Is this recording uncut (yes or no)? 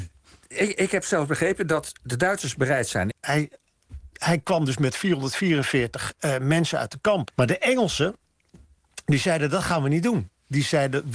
no